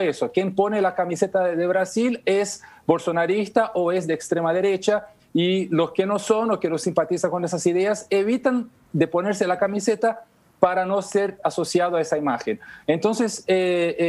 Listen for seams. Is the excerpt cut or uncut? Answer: uncut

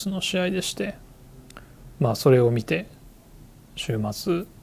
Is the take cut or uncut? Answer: uncut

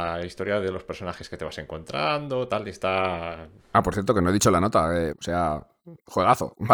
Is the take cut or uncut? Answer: cut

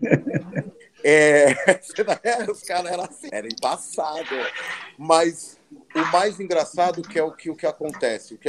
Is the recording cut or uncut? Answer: cut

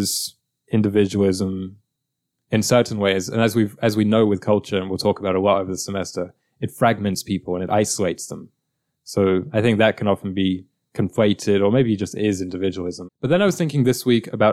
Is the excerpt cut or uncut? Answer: cut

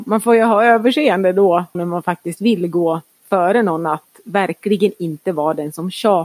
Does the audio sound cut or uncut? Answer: cut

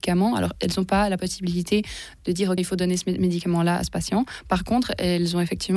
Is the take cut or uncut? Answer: cut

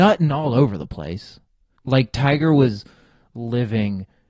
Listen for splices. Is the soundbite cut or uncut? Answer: cut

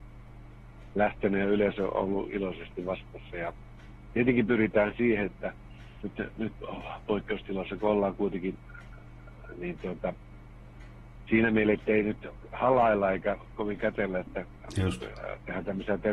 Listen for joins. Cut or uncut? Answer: uncut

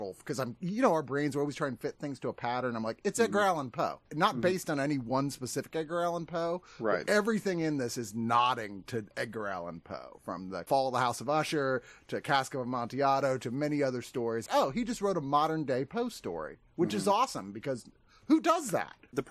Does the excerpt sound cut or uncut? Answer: cut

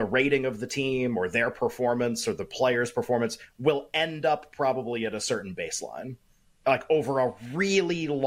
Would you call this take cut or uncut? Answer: uncut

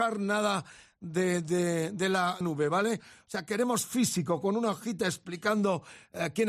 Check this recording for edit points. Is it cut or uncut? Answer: cut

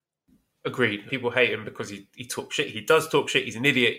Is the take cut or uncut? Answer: cut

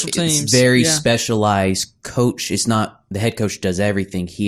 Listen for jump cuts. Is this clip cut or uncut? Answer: uncut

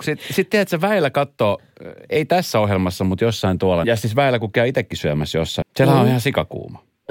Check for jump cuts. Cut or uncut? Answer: cut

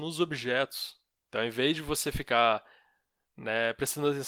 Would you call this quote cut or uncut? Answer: uncut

